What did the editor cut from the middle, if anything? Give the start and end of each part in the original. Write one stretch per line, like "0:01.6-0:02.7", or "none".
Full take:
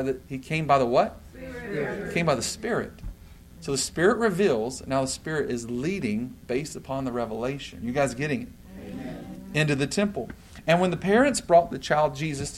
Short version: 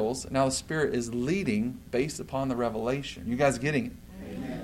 none